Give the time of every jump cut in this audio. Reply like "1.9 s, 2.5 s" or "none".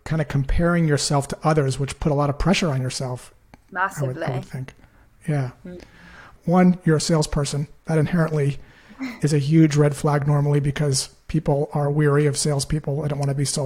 6.4 s